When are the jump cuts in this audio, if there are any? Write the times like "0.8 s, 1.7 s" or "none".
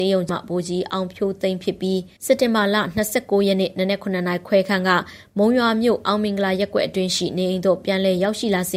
2.2 s

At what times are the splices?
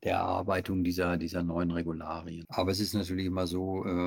2.4 s

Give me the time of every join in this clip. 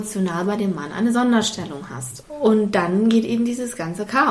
2.2 s

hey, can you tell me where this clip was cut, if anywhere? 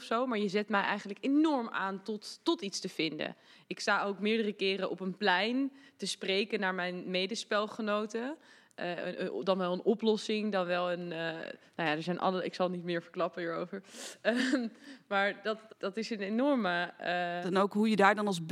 15.7 s, 17.4 s

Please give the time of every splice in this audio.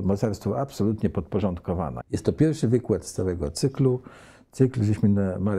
2.0 s

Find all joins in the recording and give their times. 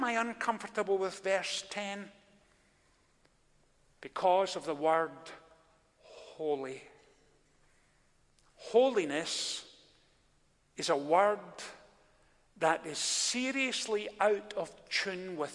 8.5 s

